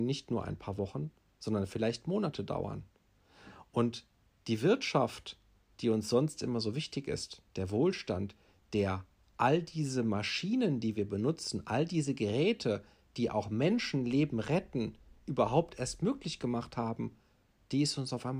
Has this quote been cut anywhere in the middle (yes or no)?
no